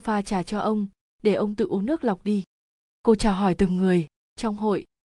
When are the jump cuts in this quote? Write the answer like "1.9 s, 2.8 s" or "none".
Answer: none